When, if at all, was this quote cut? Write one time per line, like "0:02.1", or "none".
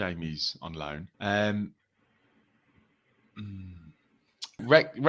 0:01.1